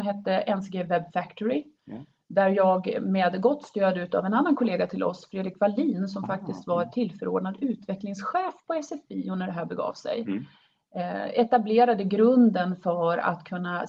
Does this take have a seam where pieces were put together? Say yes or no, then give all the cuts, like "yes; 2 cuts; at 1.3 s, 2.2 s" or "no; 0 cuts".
no; 0 cuts